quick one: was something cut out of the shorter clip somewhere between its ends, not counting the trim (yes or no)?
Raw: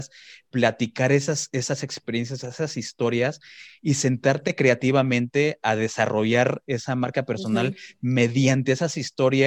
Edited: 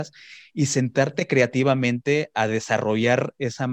no